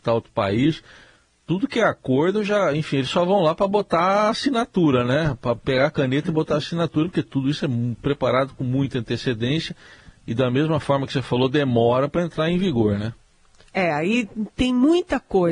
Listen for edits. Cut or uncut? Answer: uncut